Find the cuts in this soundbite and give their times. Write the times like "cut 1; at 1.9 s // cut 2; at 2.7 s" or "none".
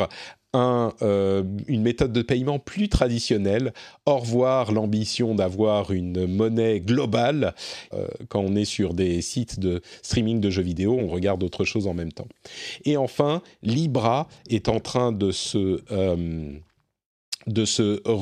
cut 1; at 7.9 s // cut 2; at 11.0 s